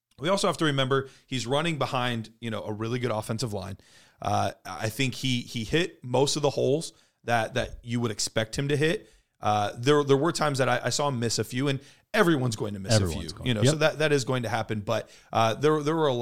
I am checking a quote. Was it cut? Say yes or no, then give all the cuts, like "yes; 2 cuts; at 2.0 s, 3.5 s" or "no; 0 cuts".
no; 0 cuts